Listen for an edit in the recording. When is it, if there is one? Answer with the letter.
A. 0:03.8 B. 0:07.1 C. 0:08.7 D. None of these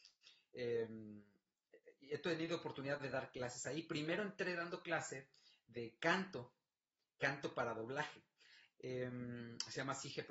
C